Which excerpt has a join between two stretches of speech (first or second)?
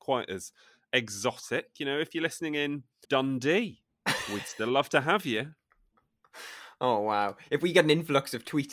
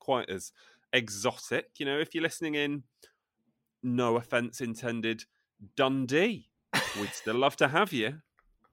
first